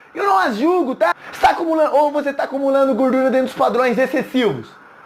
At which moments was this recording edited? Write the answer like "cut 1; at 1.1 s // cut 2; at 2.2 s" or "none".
cut 1; at 1.1 s